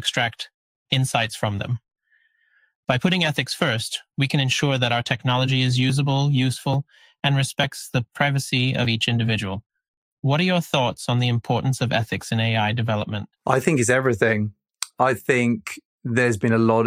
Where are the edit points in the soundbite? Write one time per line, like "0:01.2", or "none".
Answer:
0:13.4